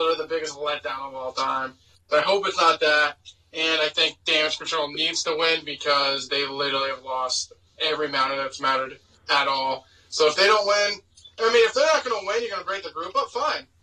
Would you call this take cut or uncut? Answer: uncut